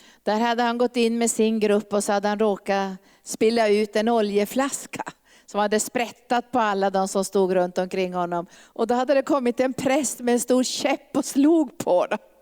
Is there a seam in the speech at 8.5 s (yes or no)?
yes